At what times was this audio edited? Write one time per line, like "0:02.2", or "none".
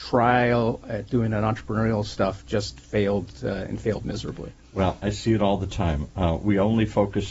none